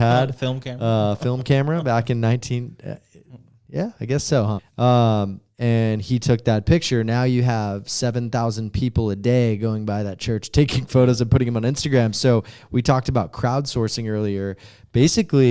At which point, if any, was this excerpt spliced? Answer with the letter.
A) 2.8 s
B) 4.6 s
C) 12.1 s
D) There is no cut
B